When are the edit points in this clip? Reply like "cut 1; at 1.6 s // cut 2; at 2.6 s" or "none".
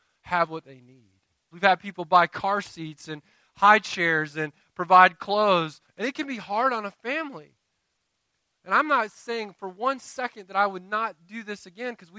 cut 1; at 1.5 s // cut 2; at 5.9 s